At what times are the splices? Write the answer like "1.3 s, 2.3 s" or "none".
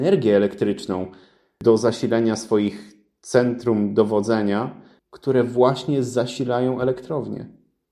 5.0 s